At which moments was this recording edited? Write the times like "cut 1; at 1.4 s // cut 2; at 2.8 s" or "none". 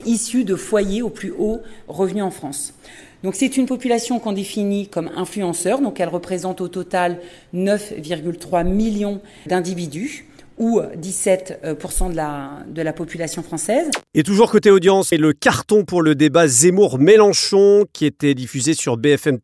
cut 1; at 9.5 s // cut 2; at 15.1 s